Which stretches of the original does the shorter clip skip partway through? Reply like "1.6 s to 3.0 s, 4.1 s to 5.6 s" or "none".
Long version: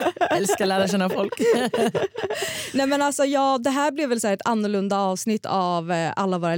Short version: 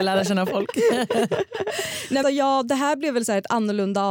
2.9 s to 3.2 s